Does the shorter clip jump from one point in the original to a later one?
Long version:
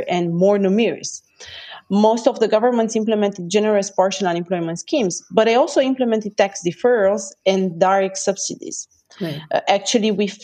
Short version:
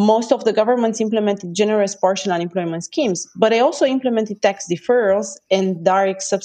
no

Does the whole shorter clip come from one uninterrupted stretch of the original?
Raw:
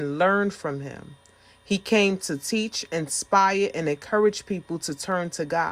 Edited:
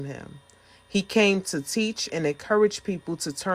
no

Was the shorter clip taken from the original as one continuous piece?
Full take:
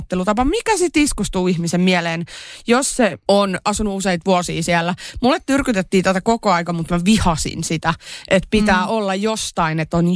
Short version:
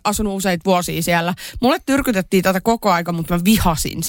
yes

